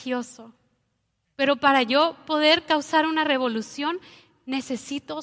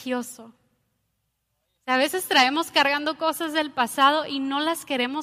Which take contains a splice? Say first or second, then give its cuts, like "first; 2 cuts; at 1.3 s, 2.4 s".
first; 1 cut; at 1.2 s